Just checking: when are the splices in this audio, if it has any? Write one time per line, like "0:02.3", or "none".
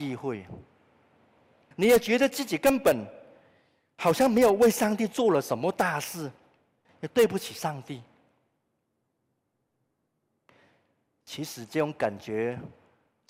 0:01.7
0:06.8